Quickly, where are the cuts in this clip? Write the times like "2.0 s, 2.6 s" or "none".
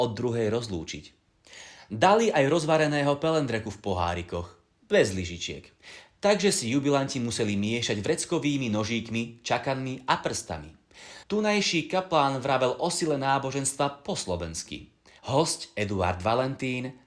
11.2 s, 15.2 s